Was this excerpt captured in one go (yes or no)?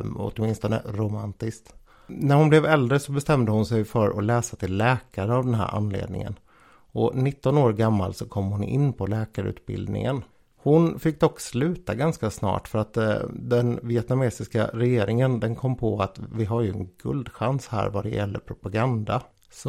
yes